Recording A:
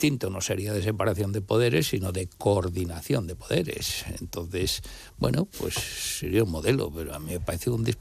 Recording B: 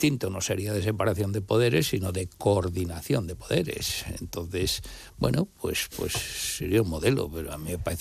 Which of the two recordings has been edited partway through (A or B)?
A